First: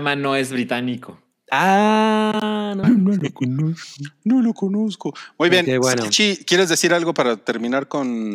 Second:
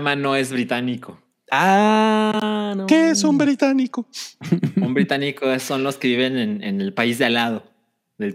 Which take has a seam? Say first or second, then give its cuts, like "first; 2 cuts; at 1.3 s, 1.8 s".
first; 1 cut; at 2.8 s